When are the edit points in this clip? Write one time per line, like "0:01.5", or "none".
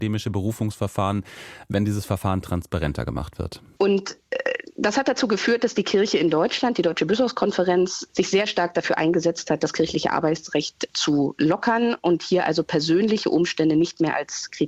0:03.8
0:08.1